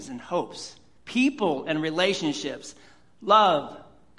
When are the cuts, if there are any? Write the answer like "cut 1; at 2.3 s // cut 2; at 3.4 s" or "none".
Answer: cut 1; at 1.0 s

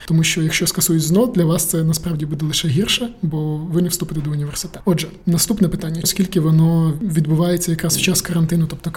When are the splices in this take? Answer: cut 1; at 6.0 s

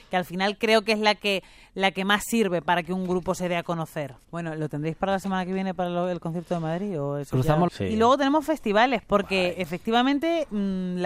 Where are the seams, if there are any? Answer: cut 1; at 4.2 s // cut 2; at 7.7 s // cut 3; at 9.5 s

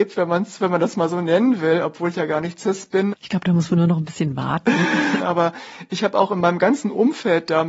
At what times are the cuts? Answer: cut 1; at 3.1 s // cut 2; at 5.2 s

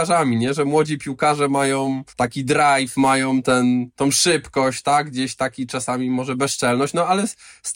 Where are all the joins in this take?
cut 1; at 2.1 s

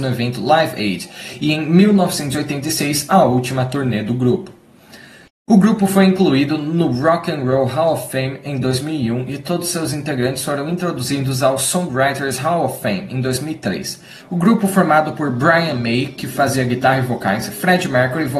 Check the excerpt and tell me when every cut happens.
cut 1; at 14.2 s

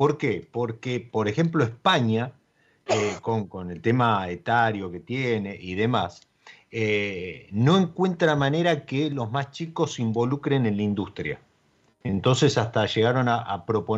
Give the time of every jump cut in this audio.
none

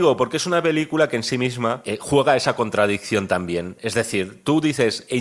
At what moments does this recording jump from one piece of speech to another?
none

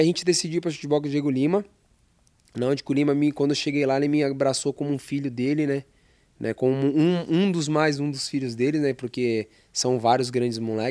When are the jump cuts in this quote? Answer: none

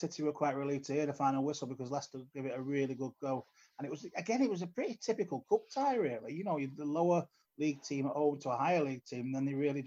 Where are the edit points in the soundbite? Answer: none

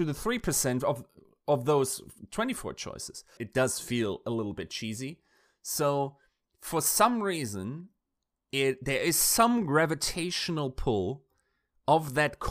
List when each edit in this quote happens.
cut 1; at 3.4 s

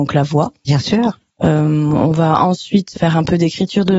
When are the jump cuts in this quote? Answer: cut 1; at 1.3 s // cut 2; at 2.9 s

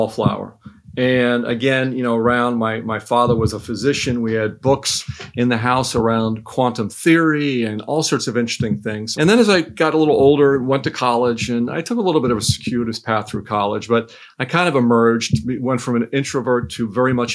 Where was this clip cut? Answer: cut 1; at 9.1 s

